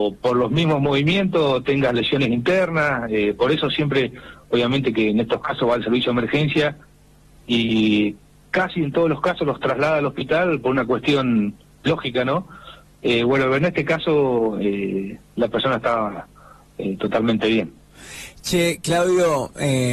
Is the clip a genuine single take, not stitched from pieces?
yes; 0 cuts

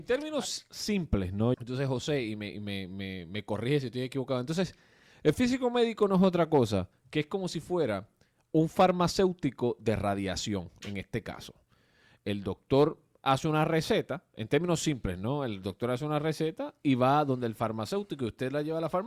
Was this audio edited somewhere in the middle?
yes; 1 cut; at 1.5 s

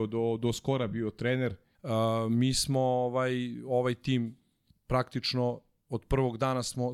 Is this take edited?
yes; 1 cut; at 1.8 s

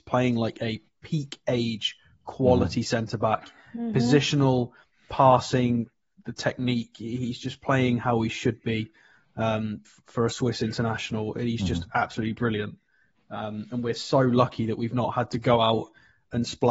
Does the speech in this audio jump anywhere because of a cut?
no; 0 cuts

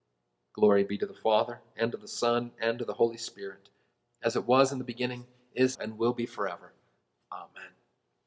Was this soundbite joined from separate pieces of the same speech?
yes; 1 cut; at 5.8 s

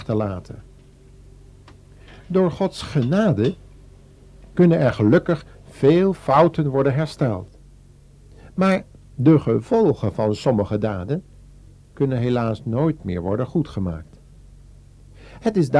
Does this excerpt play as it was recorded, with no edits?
yes; 0 cuts

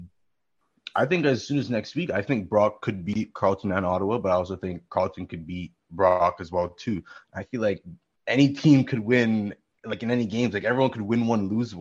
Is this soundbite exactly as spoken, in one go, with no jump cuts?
no; 1 cut; at 7.2 s

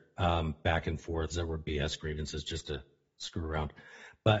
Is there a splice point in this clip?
yes; 1 cut; at 1.3 s

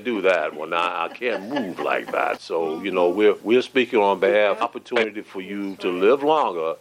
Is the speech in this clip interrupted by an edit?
yes; 2 cuts; at 2.4 s, 4.6 s

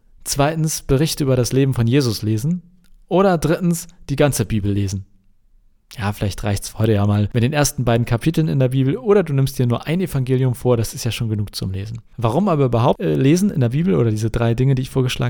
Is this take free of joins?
yes; 0 cuts

